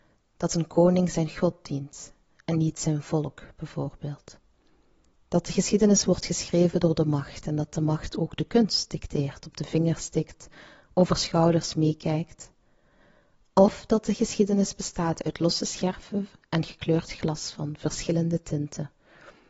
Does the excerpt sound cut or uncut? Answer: uncut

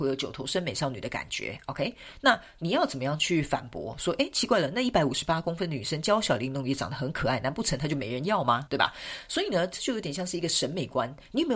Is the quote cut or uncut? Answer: cut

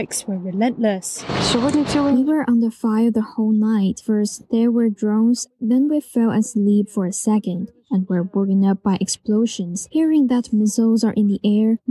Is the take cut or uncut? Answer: uncut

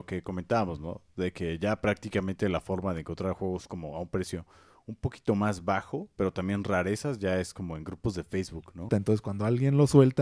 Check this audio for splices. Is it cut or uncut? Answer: cut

